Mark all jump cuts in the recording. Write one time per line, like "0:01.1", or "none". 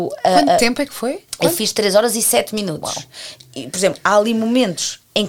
0:01.3